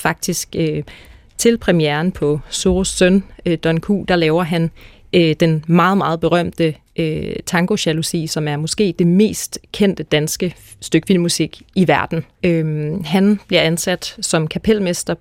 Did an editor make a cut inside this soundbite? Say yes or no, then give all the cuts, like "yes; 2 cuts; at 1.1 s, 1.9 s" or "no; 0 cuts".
yes; 1 cut; at 12.4 s